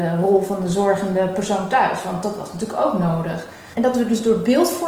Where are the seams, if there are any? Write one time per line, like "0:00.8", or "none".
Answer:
none